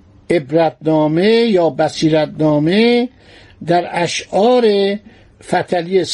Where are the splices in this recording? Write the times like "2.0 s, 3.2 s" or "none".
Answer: none